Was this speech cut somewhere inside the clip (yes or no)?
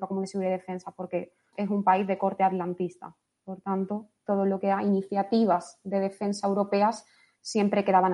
yes